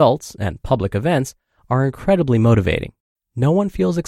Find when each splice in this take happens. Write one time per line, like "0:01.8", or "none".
0:03.2